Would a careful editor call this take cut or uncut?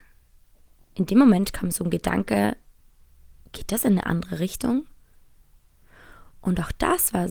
uncut